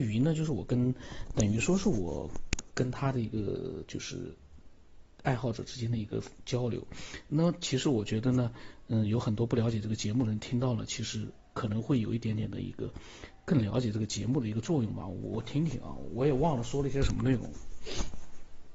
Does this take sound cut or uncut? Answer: uncut